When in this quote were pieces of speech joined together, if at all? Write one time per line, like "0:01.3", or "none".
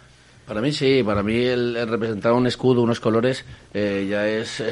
none